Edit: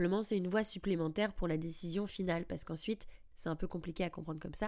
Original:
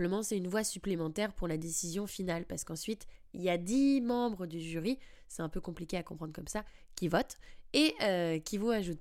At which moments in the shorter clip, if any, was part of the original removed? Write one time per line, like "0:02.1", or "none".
0:03.3